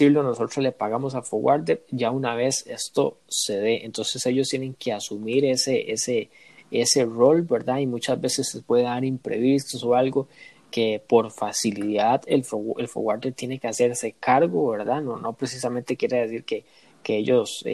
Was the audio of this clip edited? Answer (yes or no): no